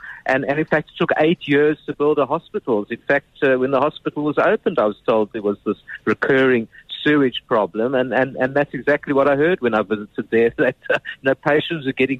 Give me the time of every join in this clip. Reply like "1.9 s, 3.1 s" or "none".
2.9 s